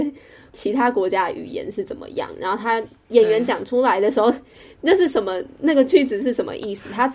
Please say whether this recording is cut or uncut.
uncut